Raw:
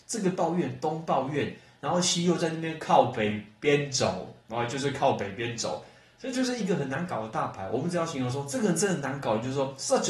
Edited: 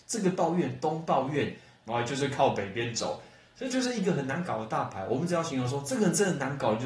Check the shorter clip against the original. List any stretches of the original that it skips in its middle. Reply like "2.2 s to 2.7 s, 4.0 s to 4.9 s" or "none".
1.8 s to 4.4 s